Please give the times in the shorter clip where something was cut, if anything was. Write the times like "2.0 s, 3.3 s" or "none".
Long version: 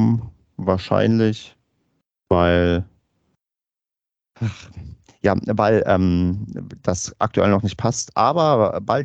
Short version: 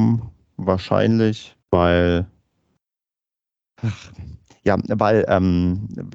1.6 s